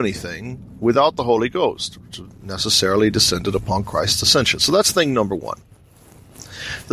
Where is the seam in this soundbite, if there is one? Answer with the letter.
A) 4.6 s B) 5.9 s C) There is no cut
C